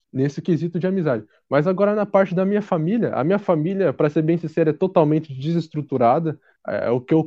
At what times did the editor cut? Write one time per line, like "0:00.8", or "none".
none